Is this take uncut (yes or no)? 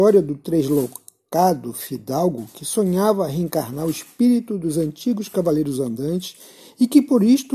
yes